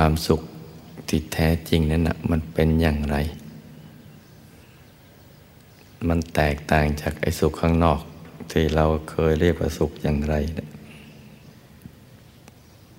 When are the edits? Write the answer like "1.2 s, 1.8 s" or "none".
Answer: none